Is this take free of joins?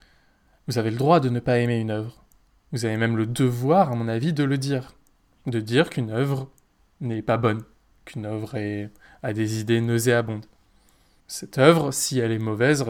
no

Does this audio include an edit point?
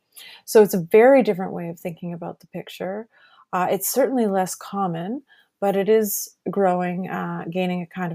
no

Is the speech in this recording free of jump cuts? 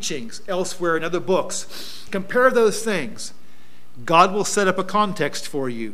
no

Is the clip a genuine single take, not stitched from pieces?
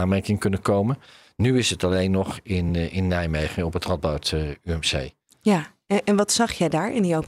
yes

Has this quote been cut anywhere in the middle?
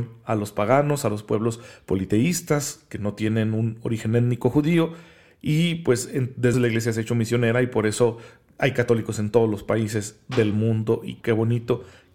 yes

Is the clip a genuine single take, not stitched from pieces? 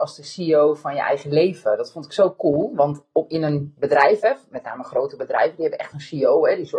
yes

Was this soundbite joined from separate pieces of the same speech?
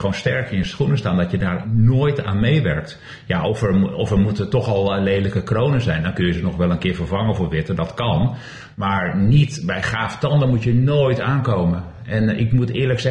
no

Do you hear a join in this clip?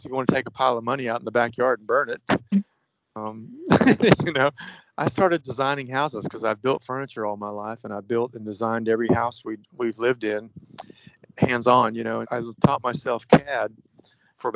yes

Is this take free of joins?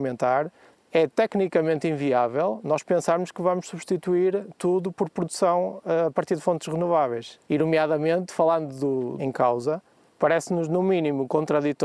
no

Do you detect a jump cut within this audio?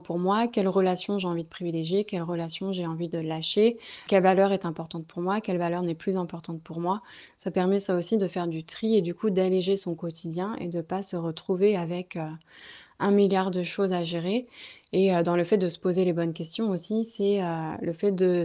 yes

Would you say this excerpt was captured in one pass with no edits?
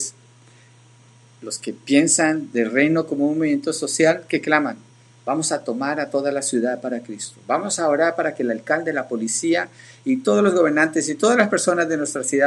yes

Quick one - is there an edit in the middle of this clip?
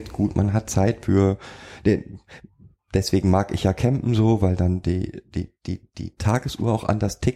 no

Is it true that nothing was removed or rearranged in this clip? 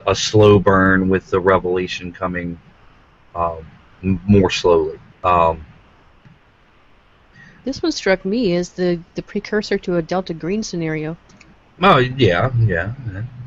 no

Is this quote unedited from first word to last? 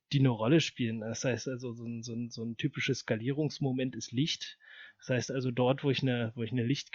yes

